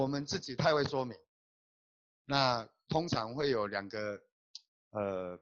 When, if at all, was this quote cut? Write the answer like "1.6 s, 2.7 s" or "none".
none